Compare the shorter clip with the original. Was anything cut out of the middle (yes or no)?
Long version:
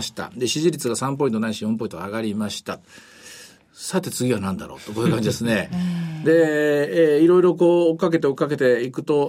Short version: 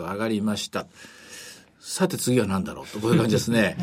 no